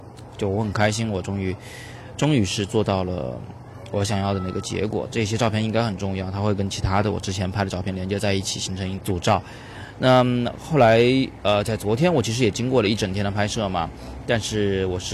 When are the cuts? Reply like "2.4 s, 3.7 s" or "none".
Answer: 9.0 s